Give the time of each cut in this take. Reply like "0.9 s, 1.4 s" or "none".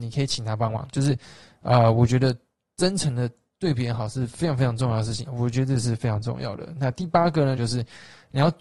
5.2 s, 7.6 s